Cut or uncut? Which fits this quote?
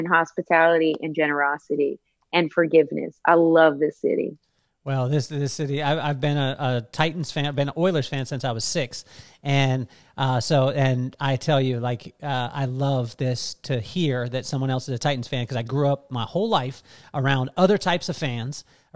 uncut